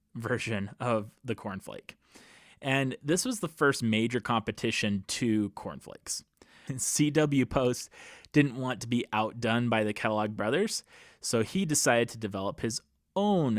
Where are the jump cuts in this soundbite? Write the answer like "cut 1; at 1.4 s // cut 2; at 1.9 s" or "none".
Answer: cut 1; at 6.7 s